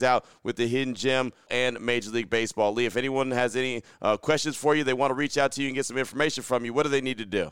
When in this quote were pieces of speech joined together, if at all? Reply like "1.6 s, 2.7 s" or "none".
1.5 s